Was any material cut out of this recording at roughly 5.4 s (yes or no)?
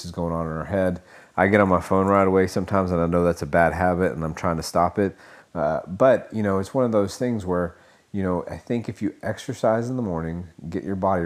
yes